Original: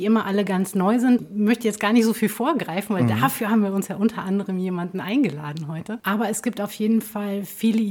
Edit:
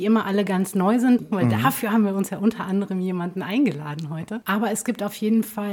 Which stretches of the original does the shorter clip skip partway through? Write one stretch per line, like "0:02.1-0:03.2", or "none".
0:01.3-0:02.9